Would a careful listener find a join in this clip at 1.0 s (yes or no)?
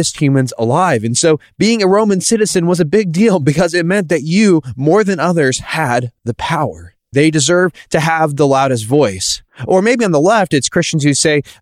no